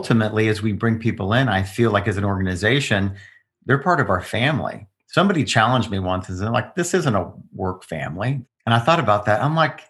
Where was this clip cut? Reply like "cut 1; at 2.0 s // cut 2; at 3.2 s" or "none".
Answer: cut 1; at 8.4 s